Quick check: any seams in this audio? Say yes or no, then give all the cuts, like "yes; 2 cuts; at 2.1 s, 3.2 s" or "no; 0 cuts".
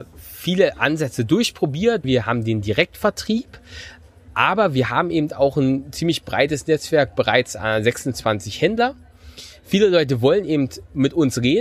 yes; 1 cut; at 2.0 s